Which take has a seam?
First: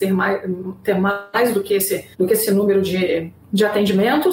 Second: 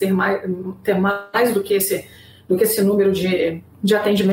first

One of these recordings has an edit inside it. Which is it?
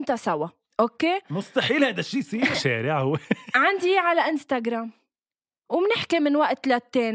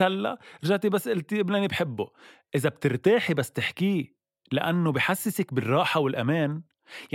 first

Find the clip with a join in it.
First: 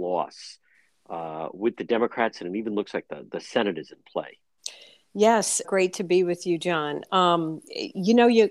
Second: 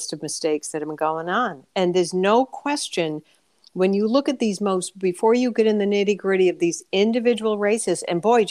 first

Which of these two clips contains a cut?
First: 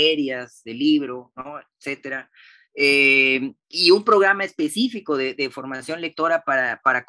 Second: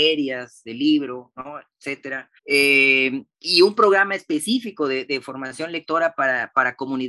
second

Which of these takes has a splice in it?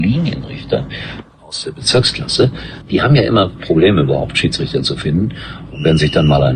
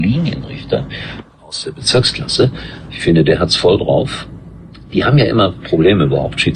first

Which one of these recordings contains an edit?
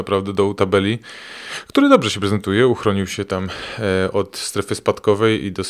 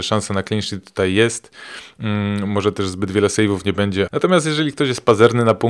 second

